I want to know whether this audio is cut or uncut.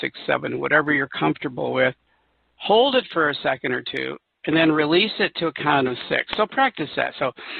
uncut